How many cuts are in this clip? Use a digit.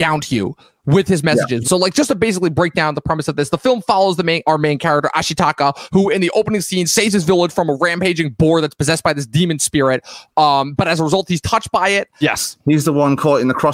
2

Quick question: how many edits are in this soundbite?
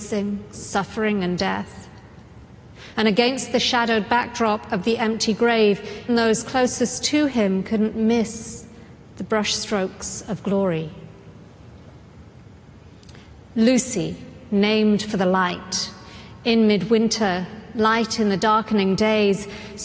2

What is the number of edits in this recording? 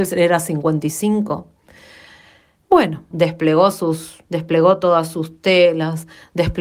2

